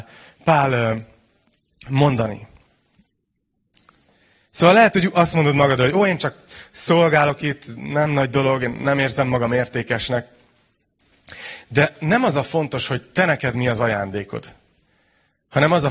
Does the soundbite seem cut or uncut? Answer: uncut